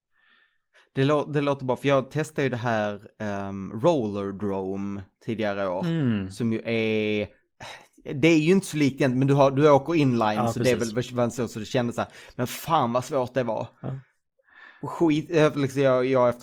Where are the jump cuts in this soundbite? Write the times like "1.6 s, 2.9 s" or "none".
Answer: none

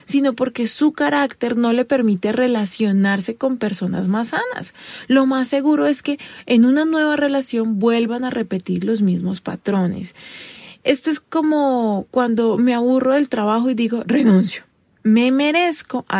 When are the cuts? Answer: none

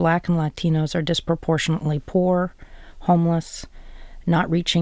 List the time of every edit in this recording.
none

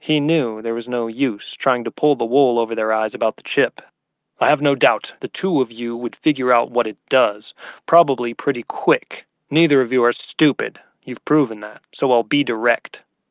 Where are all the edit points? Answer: 5.2 s

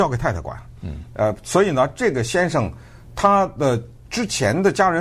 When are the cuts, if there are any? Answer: none

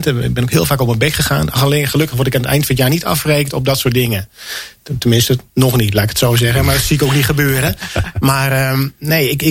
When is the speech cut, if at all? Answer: none

